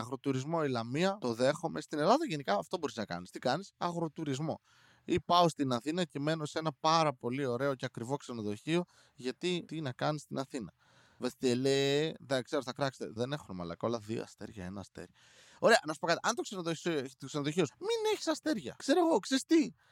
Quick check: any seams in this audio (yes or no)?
yes